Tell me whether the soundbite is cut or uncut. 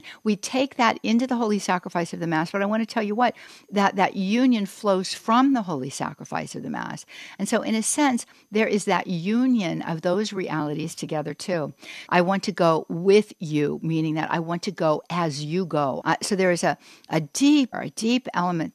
cut